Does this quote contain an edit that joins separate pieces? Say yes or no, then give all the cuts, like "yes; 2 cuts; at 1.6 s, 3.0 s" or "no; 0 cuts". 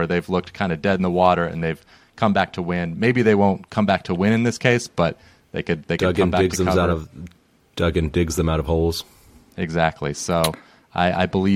no; 0 cuts